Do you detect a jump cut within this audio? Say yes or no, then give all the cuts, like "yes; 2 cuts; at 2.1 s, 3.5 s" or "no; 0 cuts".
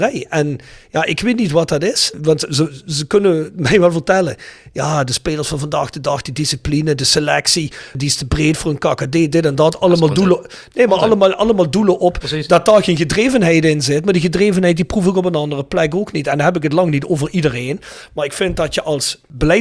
no; 0 cuts